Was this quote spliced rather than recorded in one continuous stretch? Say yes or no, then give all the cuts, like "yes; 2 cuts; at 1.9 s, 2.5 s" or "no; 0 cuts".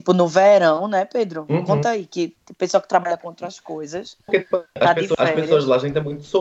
no; 0 cuts